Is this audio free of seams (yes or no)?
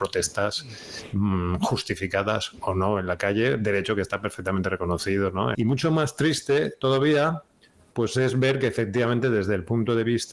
no